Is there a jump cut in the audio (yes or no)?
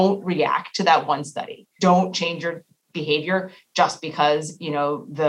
yes